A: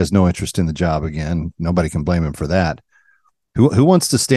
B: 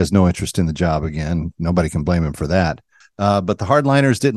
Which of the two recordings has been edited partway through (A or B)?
B